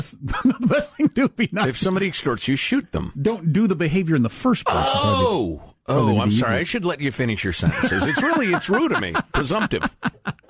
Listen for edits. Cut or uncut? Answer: uncut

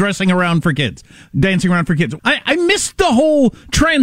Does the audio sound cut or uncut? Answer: cut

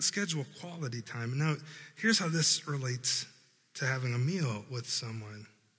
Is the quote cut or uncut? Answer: uncut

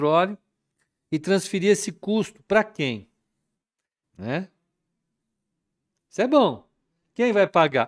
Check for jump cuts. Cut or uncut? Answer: cut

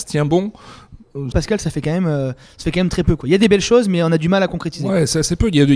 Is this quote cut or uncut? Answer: cut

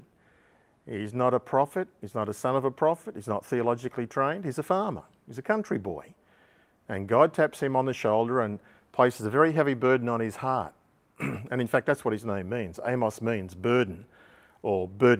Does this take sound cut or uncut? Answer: uncut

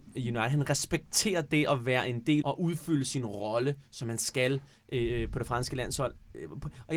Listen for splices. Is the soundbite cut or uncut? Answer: cut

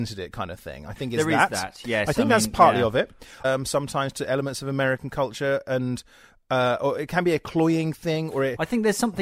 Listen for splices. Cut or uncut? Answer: cut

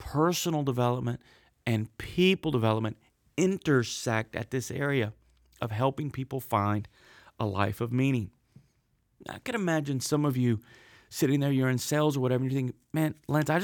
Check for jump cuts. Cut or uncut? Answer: uncut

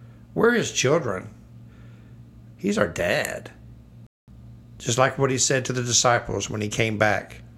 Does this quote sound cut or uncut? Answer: cut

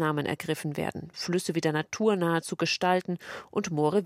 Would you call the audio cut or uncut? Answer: cut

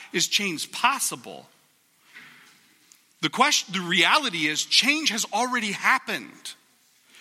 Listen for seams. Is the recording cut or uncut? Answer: uncut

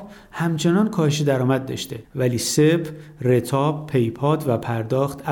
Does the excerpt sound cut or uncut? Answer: uncut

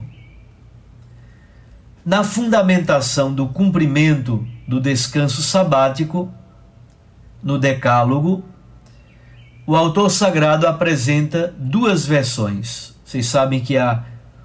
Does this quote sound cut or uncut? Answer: uncut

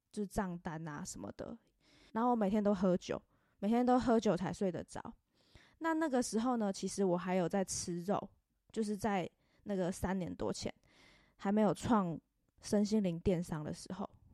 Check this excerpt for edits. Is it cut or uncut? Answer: cut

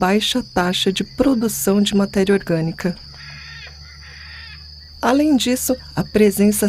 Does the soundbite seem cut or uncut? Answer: uncut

